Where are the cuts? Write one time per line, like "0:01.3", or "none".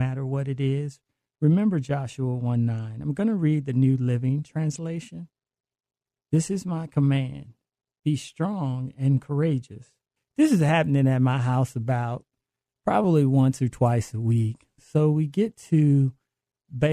0:10.2